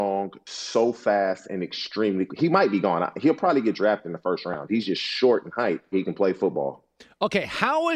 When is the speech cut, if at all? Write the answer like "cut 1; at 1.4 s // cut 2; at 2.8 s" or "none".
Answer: cut 1; at 4.7 s // cut 2; at 5.9 s